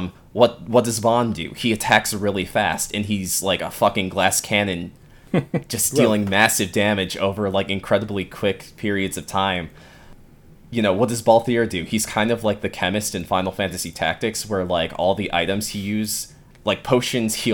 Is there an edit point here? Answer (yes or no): no